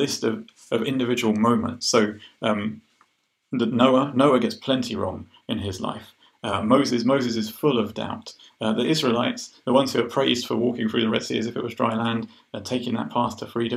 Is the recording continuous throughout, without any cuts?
yes; 0 cuts

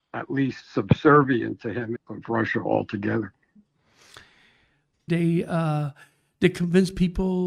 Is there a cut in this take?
yes; 2 cuts; at 2.0 s, 5.1 s

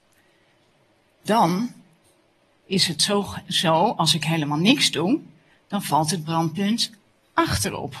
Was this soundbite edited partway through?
no; 0 cuts

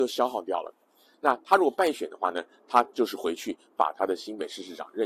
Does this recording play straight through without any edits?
no; 1 cut; at 1.1 s

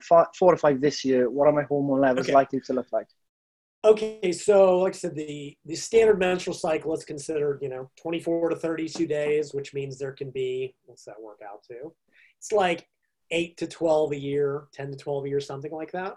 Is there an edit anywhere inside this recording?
no; 0 cuts

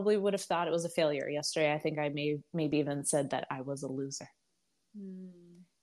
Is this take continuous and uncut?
yes; 0 cuts

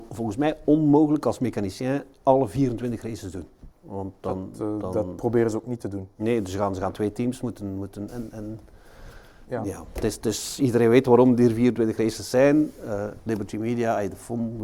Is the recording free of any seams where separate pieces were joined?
no; 2 cuts; at 3.7 s, 8.1 s

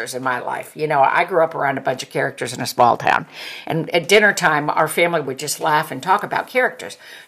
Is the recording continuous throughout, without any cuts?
yes; 0 cuts

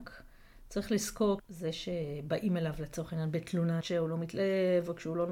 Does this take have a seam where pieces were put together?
yes; 2 cuts; at 1.4 s, 3.8 s

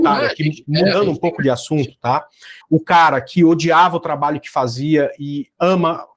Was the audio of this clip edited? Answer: yes; 1 cut; at 2.6 s

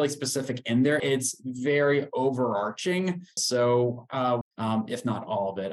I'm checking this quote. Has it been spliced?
yes; 3 cuts; at 1.0 s, 3.4 s, 4.4 s

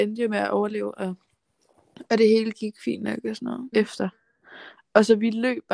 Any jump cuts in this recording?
yes; 1 cut; at 3.7 s

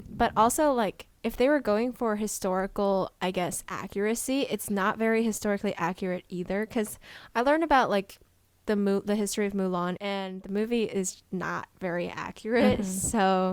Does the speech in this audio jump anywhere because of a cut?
no; 0 cuts

